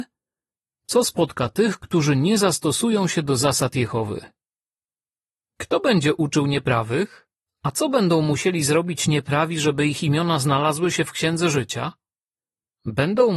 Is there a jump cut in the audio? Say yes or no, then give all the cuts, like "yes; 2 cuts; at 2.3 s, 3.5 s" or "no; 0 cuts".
yes; 1 cut; at 7.5 s